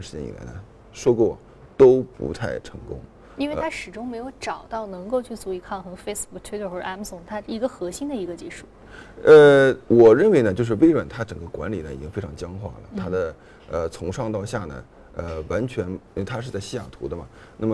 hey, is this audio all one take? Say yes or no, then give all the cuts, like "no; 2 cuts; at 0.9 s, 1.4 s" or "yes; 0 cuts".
yes; 0 cuts